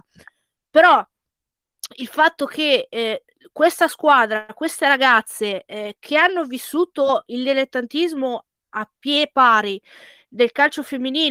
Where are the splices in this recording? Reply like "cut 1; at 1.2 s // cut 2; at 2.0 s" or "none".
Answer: none